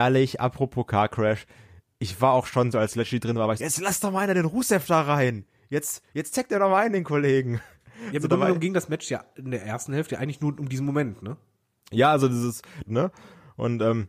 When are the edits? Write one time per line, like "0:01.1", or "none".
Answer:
0:03.6
0:12.9